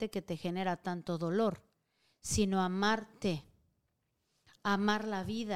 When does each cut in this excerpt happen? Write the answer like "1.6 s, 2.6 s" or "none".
none

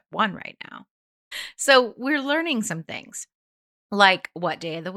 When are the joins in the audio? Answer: 1.3 s

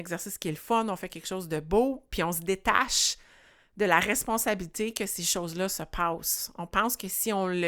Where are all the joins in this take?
none

